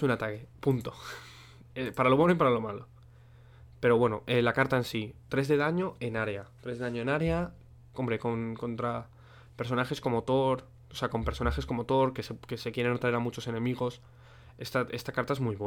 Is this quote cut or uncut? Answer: uncut